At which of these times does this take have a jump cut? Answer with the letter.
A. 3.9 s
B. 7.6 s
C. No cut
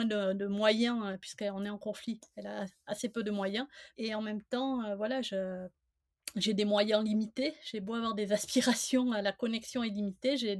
A